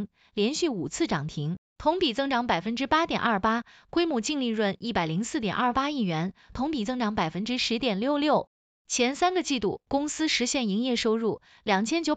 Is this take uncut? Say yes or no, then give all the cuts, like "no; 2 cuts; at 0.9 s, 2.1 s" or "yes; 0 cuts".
no; 1 cut; at 1.7 s